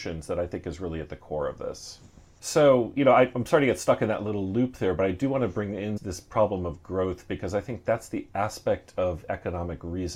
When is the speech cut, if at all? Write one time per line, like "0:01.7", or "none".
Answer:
0:02.4
0:06.0